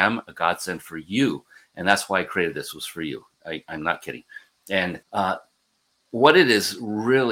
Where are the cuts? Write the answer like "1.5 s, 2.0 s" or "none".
5.0 s